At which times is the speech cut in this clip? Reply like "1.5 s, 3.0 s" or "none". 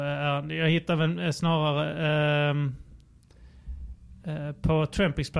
none